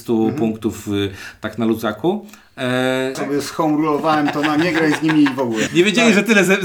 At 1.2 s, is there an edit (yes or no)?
no